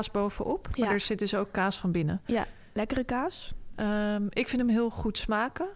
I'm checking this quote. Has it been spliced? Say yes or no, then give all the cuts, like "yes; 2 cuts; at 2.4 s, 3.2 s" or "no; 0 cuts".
no; 0 cuts